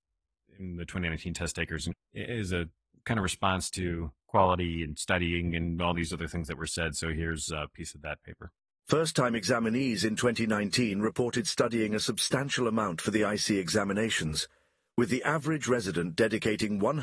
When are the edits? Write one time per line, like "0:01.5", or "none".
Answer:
0:01.9